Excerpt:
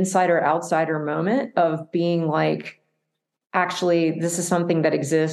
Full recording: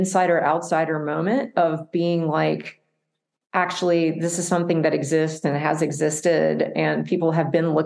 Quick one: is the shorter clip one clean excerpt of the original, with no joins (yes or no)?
yes